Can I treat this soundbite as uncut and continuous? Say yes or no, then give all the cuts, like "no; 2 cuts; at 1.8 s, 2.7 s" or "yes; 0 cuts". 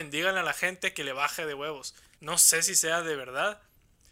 no; 1 cut; at 2.1 s